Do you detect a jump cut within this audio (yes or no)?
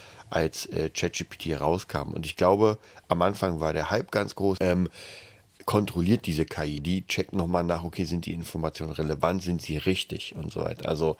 yes